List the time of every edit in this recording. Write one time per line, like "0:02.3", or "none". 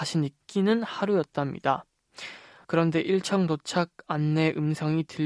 0:02.6